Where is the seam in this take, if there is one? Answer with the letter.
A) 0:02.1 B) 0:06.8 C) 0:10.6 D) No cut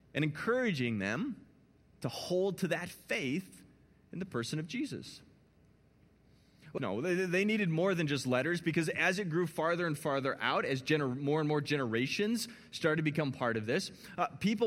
B